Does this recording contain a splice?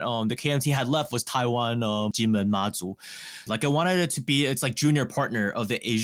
yes; 2 cuts; at 2.1 s, 3.5 s

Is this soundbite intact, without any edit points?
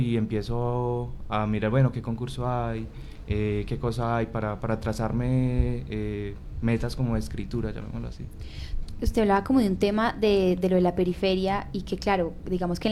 yes; 0 cuts

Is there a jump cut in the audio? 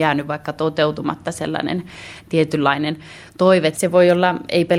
yes; 1 cut; at 3.7 s

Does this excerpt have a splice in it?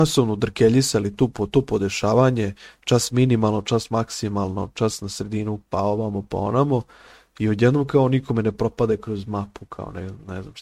no; 0 cuts

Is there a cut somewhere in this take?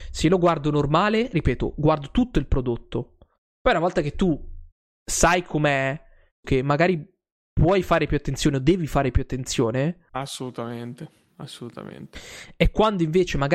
yes; 2 cuts; at 6.4 s, 10.1 s

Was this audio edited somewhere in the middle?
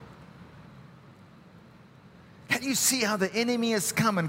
no; 0 cuts

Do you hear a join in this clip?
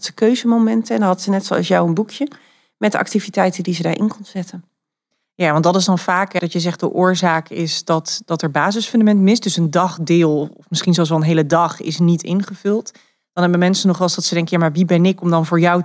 yes; 1 cut; at 6.4 s

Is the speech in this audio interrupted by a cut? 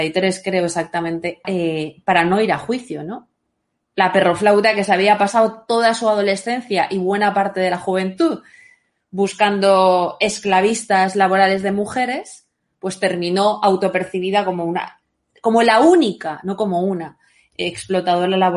yes; 1 cut; at 1.4 s

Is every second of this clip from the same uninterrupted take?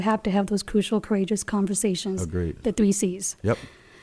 yes; 0 cuts

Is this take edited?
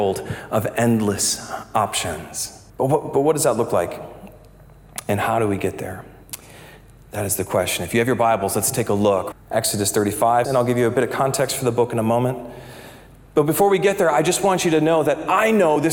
yes; 3 cuts; at 2.7 s, 9.3 s, 10.4 s

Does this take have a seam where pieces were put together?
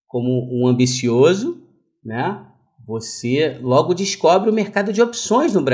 no; 0 cuts

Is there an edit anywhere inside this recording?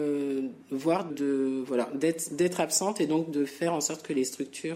yes; 1 cut; at 1.1 s

